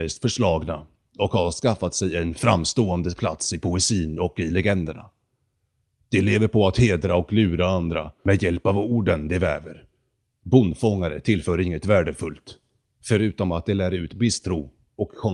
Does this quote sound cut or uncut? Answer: uncut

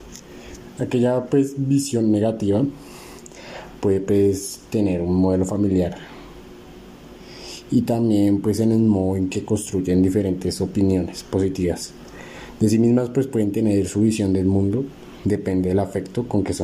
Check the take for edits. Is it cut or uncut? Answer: uncut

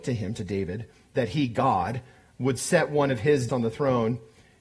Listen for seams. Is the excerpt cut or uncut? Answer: cut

